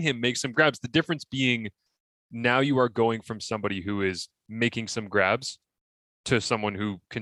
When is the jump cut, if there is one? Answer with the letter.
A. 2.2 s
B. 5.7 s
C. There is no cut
C